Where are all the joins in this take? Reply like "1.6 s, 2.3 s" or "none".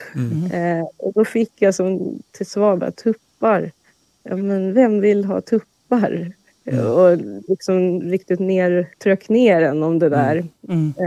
8.9 s